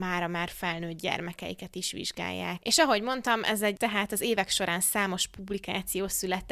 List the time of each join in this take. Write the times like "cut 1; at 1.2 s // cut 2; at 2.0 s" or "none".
cut 1; at 2.6 s // cut 2; at 3.8 s